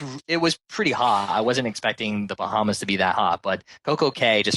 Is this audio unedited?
yes; 0 cuts

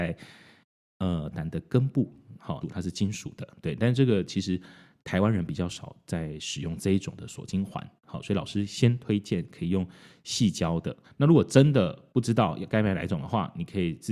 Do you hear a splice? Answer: yes; 3 cuts; at 1.3 s, 2.6 s, 11.0 s

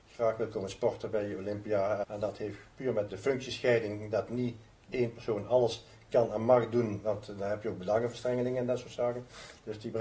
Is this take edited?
yes; 2 cuts; at 2.0 s, 3.1 s

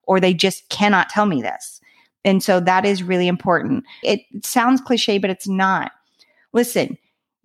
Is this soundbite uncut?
no; 1 cut; at 4.0 s

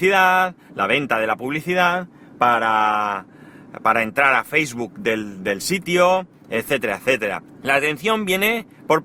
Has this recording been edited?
yes; 1 cut; at 7.5 s

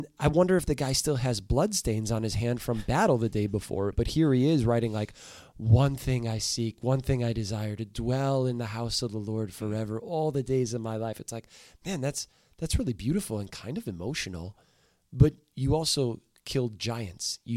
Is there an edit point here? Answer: no; 0 cuts

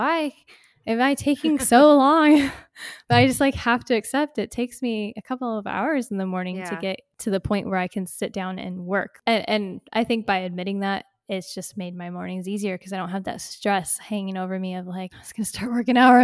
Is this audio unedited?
no; 1 cut; at 15.1 s

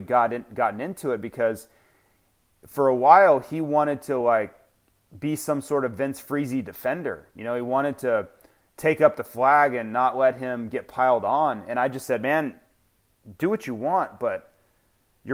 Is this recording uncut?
yes; 0 cuts

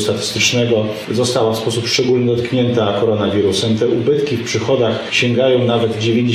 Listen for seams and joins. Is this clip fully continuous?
yes; 0 cuts

